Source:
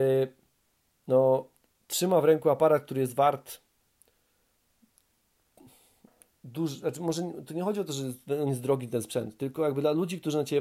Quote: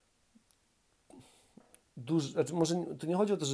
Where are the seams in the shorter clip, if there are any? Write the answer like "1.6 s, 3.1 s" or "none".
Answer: none